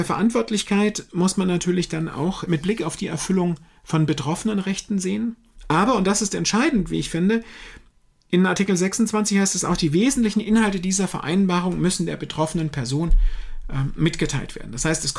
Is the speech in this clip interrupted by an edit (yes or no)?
no